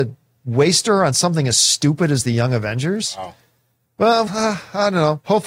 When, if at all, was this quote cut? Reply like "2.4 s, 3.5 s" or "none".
4.3 s